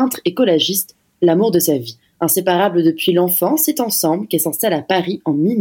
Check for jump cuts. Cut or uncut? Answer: uncut